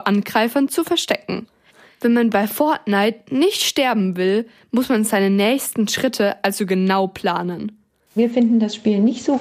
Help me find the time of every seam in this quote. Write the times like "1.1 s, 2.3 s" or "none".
8.1 s